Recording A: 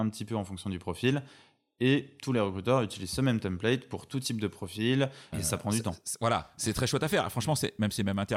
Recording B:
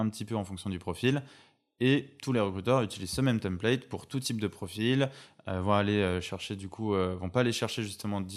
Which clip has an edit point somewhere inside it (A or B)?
A